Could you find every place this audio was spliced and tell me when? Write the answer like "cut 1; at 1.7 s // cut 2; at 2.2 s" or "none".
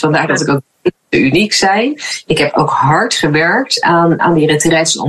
cut 1; at 4.2 s